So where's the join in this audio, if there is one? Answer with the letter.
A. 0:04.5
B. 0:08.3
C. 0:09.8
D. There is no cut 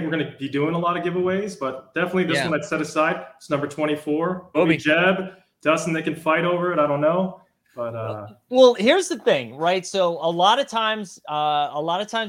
A